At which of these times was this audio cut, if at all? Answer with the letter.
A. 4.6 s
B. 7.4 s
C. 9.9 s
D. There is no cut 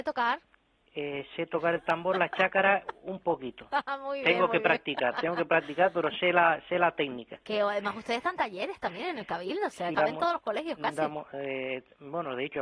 C